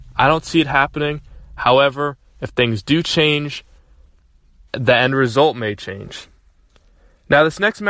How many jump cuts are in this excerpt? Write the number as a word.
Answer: one